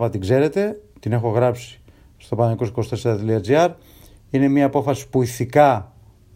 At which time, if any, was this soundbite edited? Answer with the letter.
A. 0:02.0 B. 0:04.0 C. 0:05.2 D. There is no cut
D